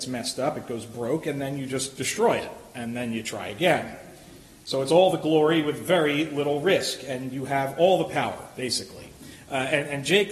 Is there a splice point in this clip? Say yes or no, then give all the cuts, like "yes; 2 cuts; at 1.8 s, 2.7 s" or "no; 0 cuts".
no; 0 cuts